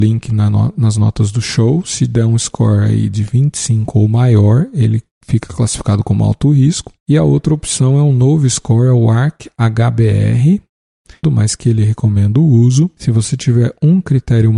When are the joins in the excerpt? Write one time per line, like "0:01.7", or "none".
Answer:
0:11.2